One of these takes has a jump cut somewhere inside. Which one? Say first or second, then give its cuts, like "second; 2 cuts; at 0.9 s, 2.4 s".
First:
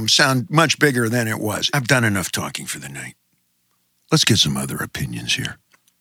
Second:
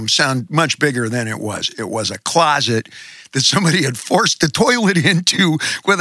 first; 1 cut; at 1.7 s